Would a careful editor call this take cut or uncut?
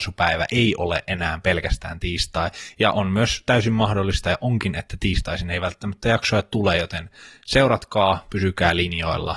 uncut